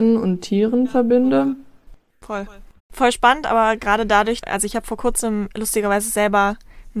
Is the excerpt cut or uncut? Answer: cut